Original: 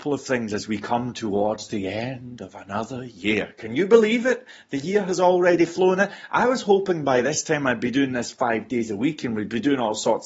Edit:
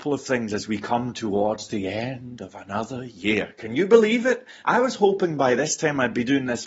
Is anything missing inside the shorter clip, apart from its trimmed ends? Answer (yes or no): yes